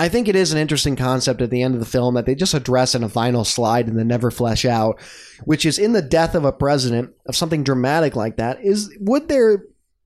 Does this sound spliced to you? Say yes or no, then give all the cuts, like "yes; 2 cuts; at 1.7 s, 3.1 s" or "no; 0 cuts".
no; 0 cuts